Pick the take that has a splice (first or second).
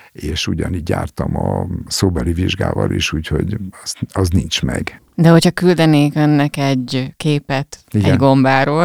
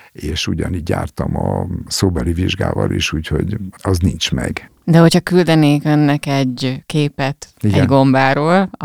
second